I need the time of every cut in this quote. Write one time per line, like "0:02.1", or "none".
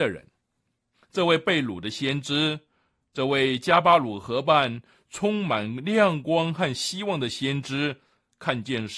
0:00.9